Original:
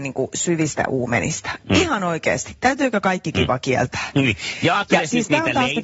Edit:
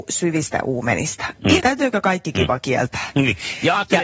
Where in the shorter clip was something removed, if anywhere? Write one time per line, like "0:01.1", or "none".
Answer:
0:01.6